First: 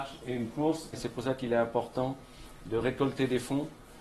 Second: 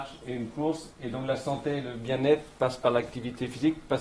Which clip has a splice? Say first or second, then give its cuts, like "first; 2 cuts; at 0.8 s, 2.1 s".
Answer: first; 1 cut; at 0.9 s